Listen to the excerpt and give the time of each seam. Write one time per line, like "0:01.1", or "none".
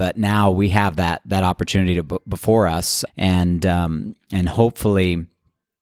0:03.1